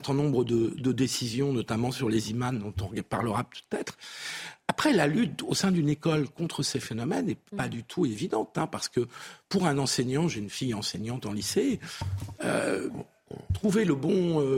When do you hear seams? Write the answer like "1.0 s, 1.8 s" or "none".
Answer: 7.5 s